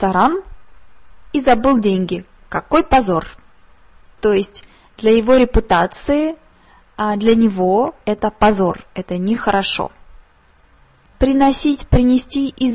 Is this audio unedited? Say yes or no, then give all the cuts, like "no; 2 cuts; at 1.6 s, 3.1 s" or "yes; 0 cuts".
no; 1 cut; at 8.0 s